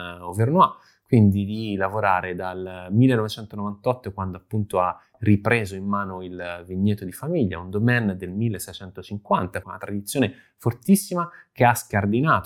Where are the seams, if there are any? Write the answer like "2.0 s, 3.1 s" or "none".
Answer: 9.6 s